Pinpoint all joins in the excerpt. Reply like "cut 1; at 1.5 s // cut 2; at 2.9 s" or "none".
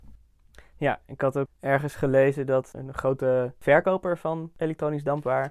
cut 1; at 2.7 s

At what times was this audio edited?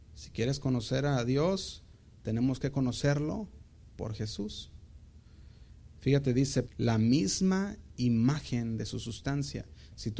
cut 1; at 6.6 s

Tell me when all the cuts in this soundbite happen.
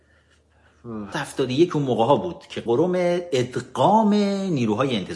cut 1; at 1.1 s // cut 2; at 2.7 s

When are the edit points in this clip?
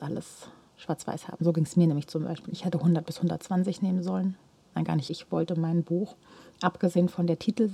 cut 1; at 2.5 s // cut 2; at 5.1 s

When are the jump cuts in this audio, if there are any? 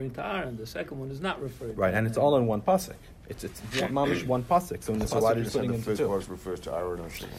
cut 1; at 5.1 s // cut 2; at 6.3 s

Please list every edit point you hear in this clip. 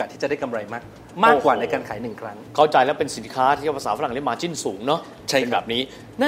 none

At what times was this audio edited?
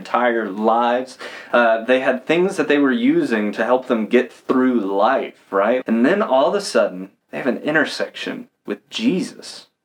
cut 1; at 5.8 s // cut 2; at 7.2 s

